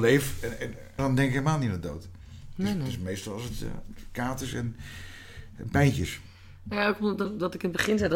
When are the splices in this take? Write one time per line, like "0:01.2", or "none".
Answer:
0:01.0